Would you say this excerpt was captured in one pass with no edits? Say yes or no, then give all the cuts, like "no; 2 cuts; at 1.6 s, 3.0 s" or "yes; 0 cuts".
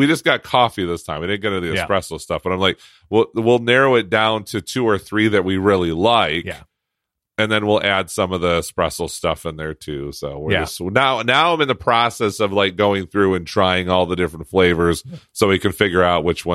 yes; 0 cuts